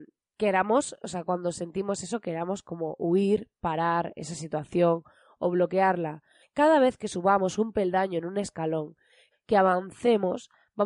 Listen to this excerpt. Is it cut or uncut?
cut